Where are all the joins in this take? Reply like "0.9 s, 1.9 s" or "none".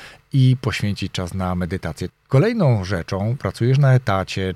2.1 s, 3.4 s